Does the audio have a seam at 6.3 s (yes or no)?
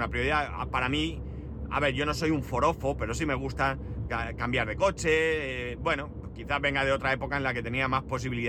no